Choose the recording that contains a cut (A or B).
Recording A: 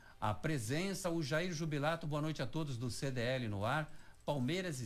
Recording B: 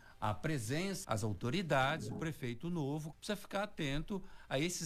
B